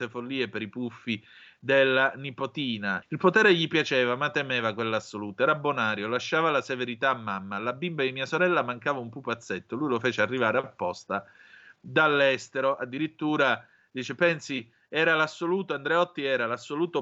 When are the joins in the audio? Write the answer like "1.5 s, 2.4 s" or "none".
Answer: 3.0 s